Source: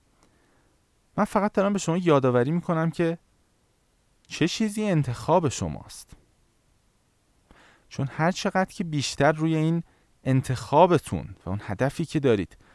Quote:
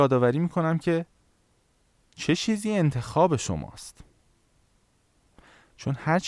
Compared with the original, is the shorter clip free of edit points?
yes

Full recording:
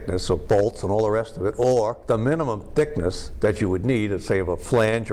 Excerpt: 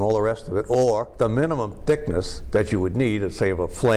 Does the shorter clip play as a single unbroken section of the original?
yes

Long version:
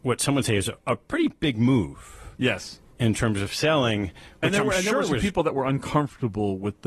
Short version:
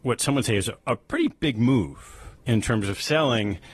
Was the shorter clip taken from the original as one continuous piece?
no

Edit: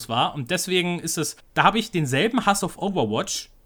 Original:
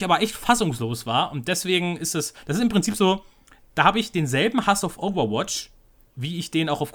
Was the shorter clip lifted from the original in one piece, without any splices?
no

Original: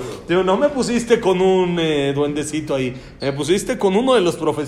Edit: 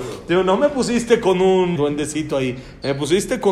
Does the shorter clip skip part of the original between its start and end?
yes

